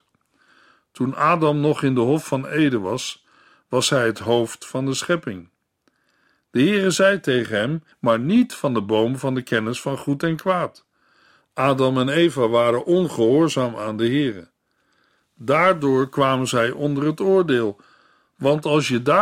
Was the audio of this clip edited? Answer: yes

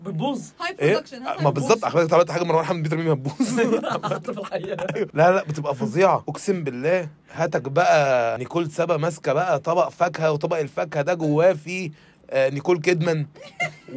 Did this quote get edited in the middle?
no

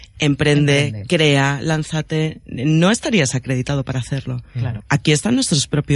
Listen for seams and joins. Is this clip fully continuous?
no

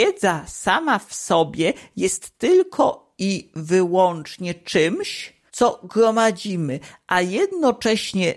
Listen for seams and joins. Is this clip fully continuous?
no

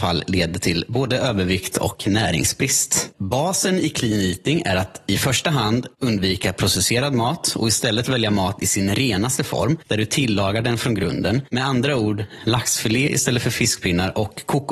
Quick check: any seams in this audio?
yes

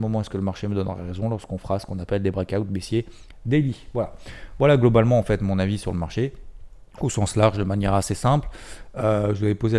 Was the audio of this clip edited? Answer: no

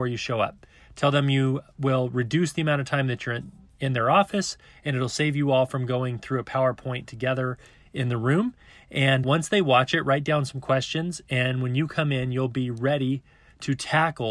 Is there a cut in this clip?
yes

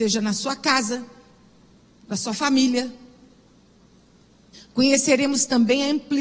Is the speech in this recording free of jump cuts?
no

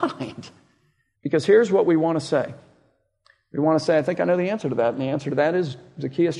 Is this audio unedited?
no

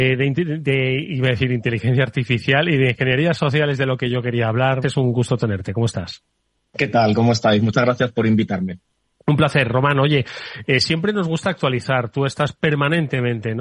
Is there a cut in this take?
yes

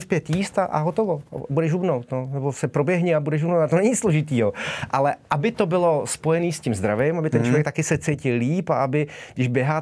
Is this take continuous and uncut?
yes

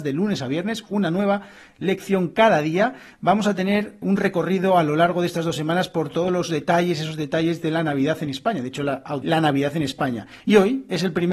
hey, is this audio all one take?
no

